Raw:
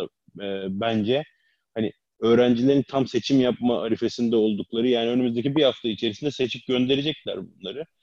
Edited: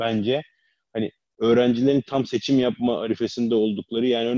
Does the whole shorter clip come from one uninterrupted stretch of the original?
yes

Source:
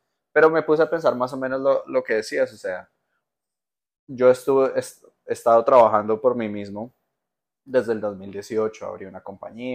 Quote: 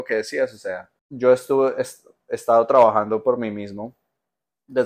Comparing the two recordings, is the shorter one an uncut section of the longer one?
no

